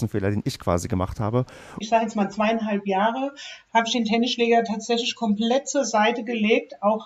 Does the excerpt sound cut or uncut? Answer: cut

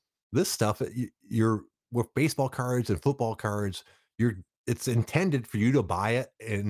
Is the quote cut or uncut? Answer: uncut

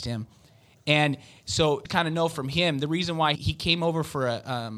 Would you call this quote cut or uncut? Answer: cut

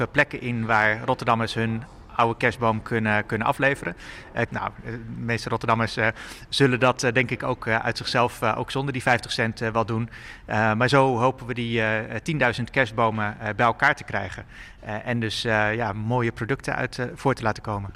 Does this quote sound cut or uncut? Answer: cut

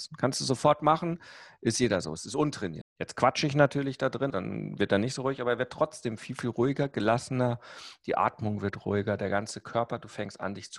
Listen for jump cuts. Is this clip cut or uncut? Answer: cut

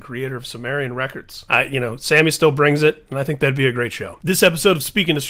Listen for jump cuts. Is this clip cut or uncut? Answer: cut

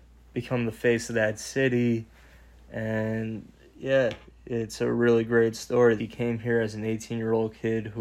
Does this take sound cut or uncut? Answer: cut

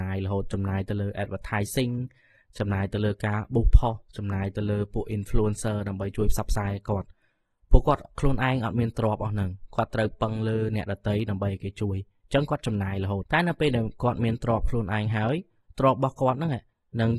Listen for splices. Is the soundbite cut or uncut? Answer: cut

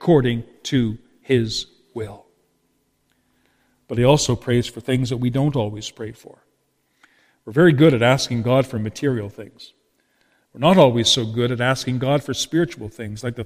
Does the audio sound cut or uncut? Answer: uncut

